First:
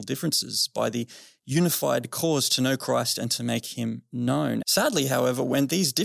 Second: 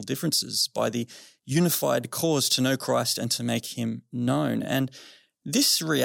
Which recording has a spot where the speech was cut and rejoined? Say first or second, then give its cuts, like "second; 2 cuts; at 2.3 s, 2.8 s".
first; 1 cut; at 4.6 s